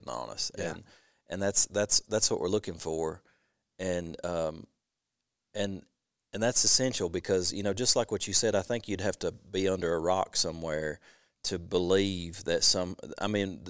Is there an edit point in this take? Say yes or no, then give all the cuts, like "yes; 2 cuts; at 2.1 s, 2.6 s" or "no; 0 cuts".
no; 0 cuts